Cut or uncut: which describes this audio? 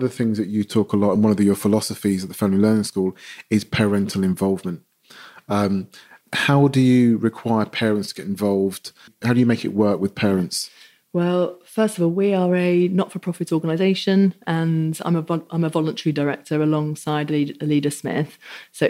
uncut